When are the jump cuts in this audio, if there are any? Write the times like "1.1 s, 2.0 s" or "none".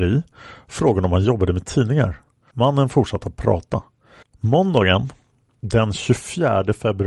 2.5 s, 4.2 s